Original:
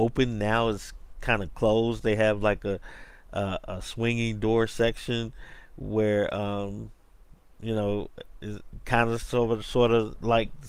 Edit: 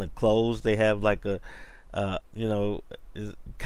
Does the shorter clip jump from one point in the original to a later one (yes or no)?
yes